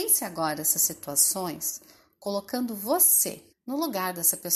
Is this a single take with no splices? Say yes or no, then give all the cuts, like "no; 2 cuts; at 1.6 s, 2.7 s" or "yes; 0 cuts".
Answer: no; 1 cut; at 3.5 s